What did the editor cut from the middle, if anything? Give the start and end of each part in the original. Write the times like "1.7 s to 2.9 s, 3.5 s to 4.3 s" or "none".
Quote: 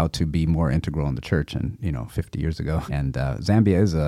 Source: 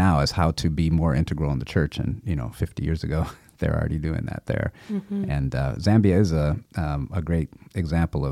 3.3 s to 5.3 s